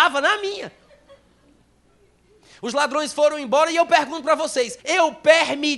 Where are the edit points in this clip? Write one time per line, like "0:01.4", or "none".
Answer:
0:04.8

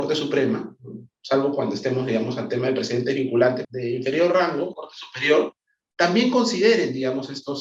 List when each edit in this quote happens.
0:03.6
0:04.7

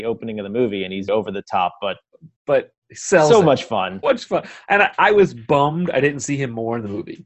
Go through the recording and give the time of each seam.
0:01.1
0:04.0

